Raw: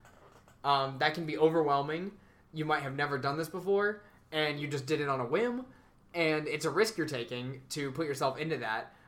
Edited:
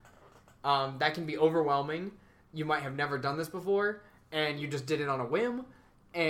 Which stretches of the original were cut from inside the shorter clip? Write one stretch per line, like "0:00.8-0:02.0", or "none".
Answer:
none